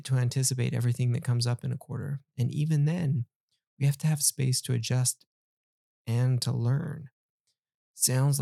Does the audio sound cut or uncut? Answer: uncut